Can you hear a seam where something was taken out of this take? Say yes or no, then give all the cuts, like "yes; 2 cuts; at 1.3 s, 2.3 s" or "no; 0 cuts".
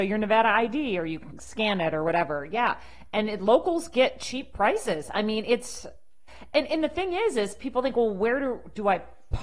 no; 0 cuts